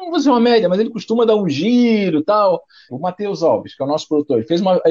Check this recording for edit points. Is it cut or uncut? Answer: cut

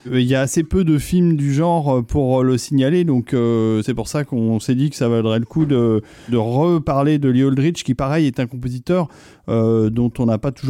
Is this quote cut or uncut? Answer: uncut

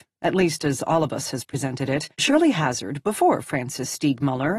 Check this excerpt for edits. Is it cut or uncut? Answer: cut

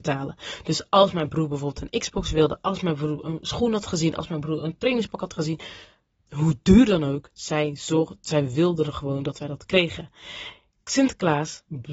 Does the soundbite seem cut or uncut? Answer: uncut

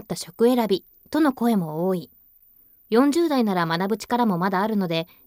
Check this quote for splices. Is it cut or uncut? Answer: cut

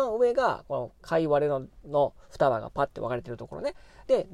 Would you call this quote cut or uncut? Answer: uncut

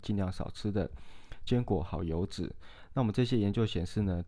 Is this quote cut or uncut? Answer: uncut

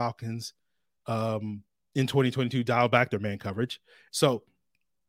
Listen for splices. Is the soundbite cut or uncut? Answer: cut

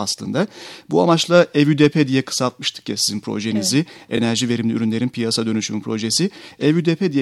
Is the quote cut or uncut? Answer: uncut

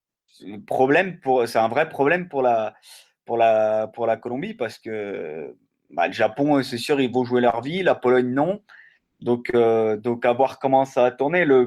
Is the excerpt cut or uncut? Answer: uncut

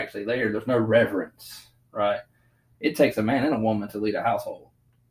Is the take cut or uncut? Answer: cut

